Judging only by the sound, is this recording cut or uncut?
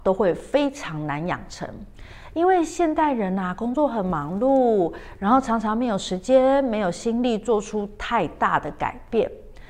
uncut